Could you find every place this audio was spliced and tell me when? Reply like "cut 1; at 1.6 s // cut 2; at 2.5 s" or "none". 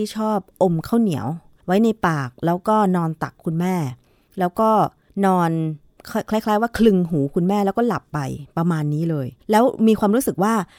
cut 1; at 9.4 s